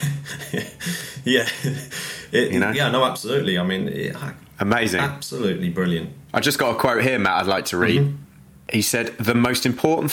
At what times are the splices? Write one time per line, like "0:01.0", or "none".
none